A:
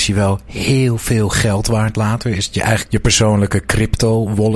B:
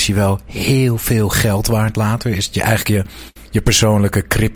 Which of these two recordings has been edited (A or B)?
A